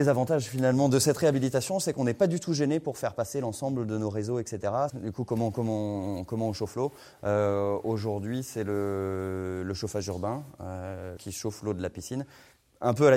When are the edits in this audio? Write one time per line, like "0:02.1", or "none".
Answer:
0:04.9
0:11.2